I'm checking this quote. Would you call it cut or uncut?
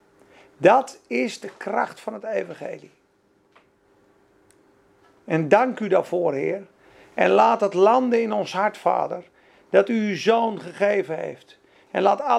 uncut